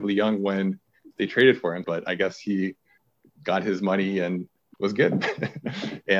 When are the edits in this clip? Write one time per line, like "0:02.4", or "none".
0:01.8
0:04.7

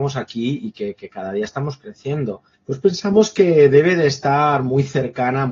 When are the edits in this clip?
0:02.5

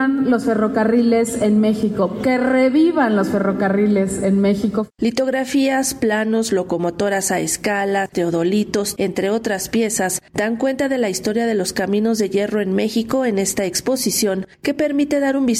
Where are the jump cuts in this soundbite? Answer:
0:08.9

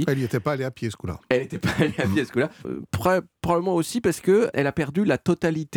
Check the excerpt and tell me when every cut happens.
0:02.6
0:04.5

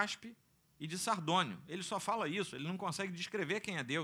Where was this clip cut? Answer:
none

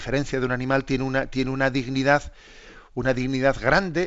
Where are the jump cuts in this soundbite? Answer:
none

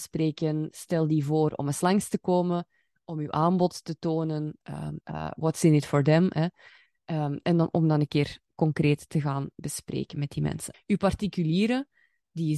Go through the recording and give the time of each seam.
0:05.0
0:10.7

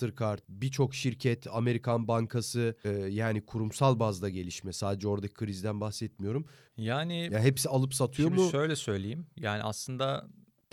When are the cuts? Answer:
0:02.8
0:06.7

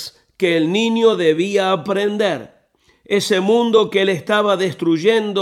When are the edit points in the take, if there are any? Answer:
none

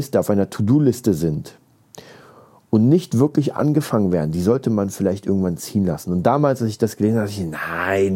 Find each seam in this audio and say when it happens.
none

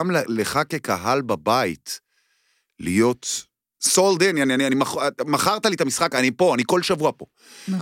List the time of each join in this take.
0:03.7

